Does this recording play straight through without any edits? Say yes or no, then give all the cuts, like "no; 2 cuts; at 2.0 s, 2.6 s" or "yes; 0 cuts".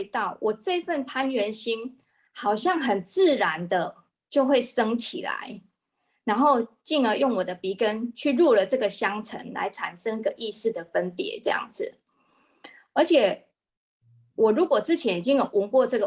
yes; 0 cuts